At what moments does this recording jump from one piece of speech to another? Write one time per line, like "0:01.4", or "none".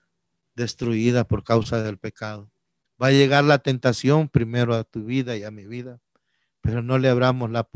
0:02.9